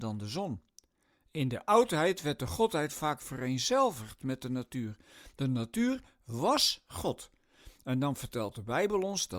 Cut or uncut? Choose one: uncut